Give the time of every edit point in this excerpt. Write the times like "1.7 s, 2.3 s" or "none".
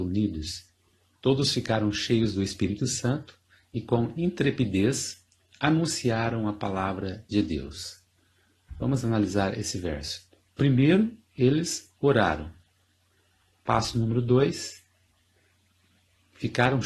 10.5 s